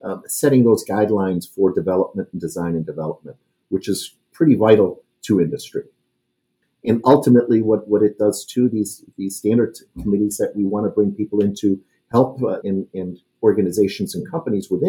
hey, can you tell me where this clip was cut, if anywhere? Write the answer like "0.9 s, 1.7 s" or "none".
6.6 s, 12.6 s